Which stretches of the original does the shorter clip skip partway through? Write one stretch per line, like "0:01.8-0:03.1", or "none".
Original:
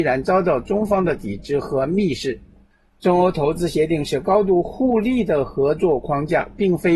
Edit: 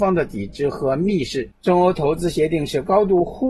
0:02.4-0:02.9